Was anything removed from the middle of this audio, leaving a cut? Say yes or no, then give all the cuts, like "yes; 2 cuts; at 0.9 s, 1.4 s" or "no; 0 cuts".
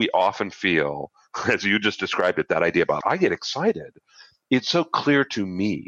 yes; 1 cut; at 3.0 s